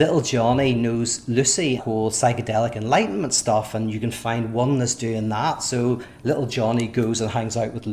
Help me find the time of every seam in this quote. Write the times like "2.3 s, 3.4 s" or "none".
1.8 s